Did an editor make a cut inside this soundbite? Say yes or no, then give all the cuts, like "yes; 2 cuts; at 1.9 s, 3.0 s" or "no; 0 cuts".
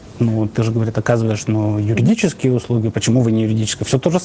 no; 0 cuts